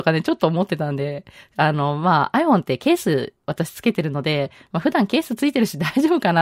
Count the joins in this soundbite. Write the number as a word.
zero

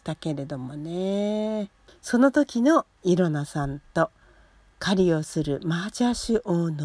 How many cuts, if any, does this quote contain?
one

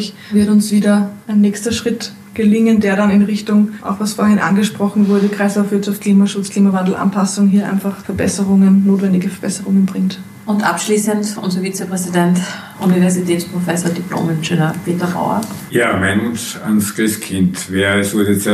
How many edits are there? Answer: zero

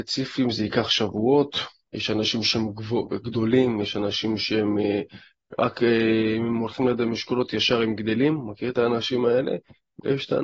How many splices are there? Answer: one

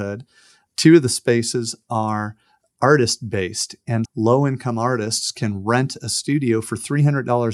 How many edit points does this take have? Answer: one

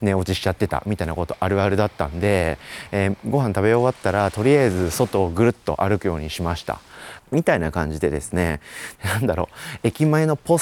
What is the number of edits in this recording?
two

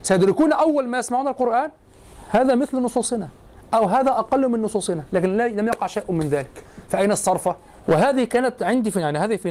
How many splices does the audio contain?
one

